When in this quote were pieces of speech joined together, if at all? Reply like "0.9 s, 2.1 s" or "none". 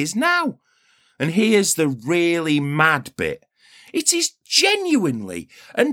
3.9 s